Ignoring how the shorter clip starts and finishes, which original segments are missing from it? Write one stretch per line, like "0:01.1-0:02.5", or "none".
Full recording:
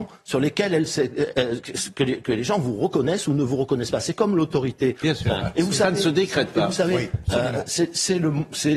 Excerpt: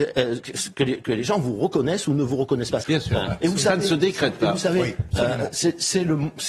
0:04.0-0:05.0